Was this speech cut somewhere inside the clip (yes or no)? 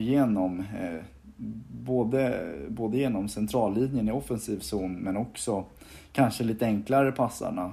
no